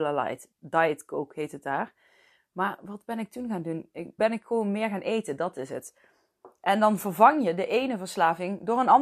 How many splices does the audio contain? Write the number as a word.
one